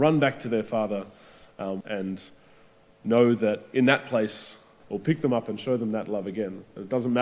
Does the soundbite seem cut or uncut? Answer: cut